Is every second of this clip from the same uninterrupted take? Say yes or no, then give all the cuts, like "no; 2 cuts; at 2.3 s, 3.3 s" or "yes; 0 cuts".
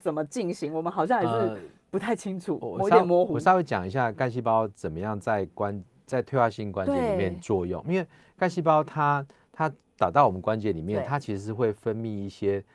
yes; 0 cuts